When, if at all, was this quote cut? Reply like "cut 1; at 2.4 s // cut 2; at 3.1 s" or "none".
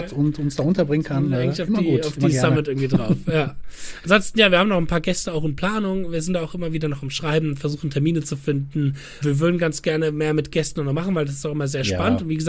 cut 1; at 9.2 s